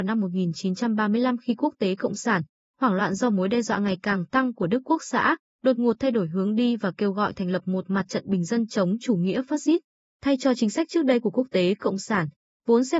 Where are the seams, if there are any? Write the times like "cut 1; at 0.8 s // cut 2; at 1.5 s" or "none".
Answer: none